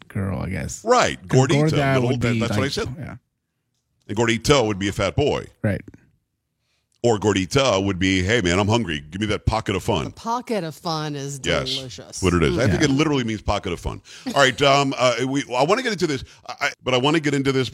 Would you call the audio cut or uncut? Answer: cut